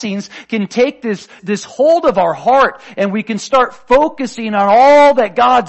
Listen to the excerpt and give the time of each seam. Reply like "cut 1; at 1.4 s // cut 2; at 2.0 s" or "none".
cut 1; at 1.4 s